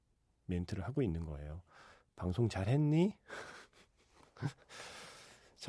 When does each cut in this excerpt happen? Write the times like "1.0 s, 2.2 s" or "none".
none